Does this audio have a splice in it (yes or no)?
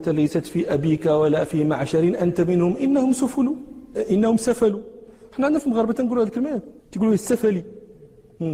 yes